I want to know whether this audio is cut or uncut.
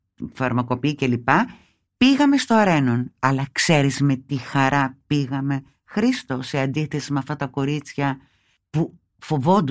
uncut